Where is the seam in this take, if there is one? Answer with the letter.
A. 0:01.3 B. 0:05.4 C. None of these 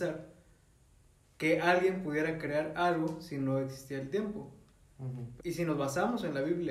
B